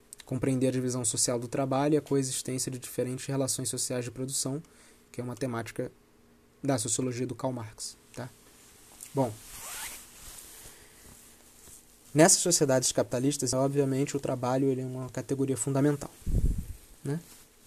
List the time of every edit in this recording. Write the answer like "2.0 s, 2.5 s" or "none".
5.1 s, 13.5 s